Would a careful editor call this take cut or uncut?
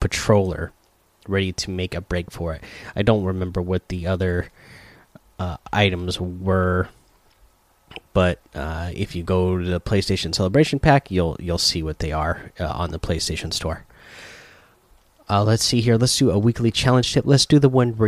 uncut